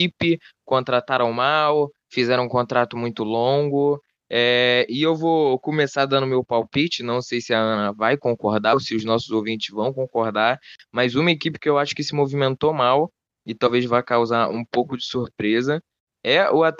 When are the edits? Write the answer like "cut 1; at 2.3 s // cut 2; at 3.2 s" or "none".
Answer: none